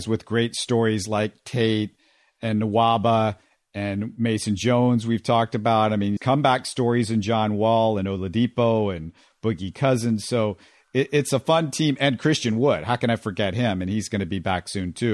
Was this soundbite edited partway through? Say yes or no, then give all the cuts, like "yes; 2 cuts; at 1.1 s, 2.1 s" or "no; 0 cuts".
yes; 1 cut; at 6.2 s